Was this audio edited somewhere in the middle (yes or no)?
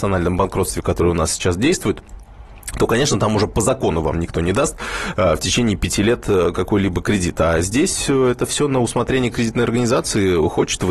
no